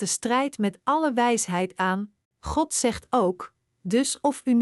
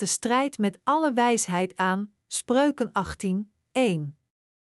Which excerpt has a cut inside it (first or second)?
first